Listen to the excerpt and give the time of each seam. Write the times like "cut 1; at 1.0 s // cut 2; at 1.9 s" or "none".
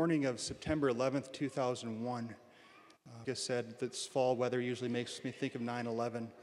cut 1; at 3.2 s